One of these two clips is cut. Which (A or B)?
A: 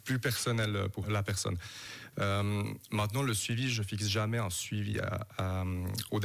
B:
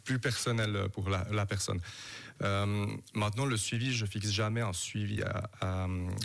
A